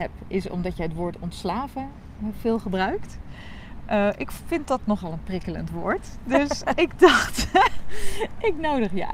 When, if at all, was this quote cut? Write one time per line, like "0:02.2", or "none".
0:06.7